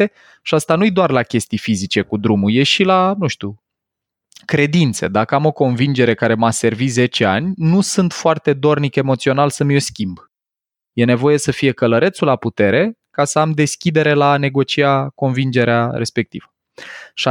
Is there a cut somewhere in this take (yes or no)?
no